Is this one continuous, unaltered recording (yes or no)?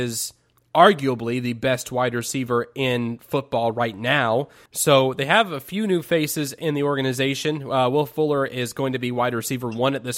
no